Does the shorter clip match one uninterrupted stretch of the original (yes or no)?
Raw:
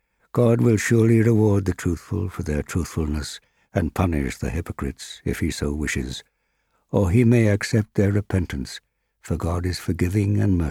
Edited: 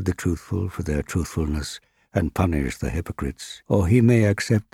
no